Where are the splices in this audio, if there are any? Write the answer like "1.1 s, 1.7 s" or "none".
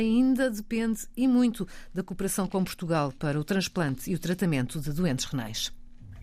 none